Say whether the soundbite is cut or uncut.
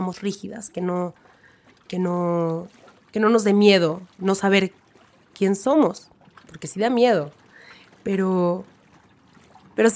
cut